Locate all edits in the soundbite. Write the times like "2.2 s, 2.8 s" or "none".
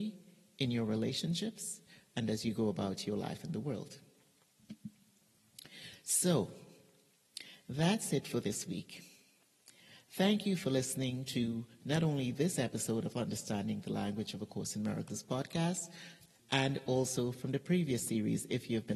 16.4 s